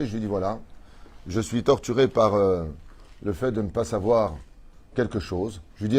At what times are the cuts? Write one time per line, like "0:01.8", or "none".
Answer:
0:04.9